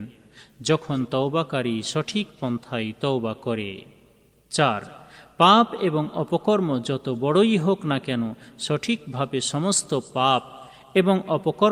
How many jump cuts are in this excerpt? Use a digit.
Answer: 0